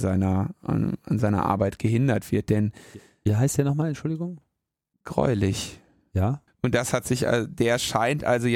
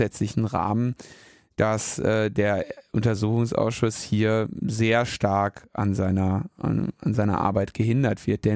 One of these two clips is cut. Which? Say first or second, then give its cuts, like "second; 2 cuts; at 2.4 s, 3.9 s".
first; 1 cut; at 6.5 s